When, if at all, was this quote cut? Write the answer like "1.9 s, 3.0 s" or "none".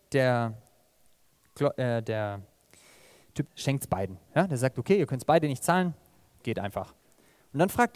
3.5 s, 6.4 s